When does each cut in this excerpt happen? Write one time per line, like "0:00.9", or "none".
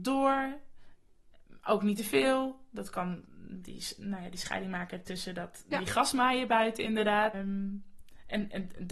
0:07.3